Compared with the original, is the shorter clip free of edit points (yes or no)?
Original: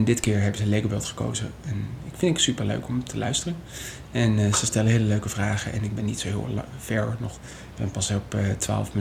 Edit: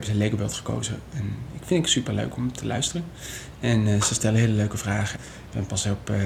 no